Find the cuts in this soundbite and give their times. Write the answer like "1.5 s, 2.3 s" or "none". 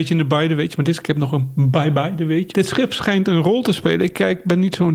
2.5 s